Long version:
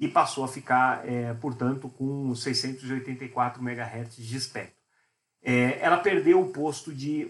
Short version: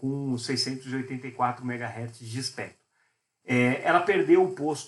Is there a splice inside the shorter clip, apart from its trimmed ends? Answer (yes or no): no